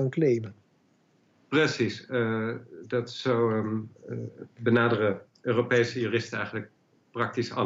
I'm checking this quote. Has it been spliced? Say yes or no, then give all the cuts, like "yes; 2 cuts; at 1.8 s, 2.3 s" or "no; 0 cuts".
no; 0 cuts